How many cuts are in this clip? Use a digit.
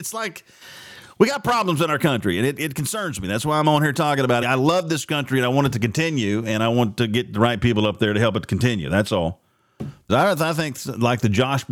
2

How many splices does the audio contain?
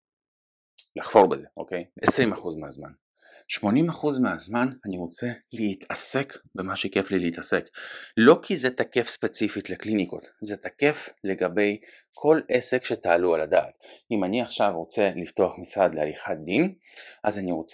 1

